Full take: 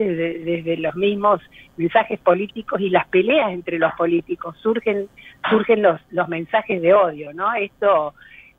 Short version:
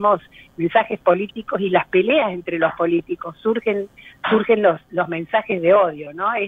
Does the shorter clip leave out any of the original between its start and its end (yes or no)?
no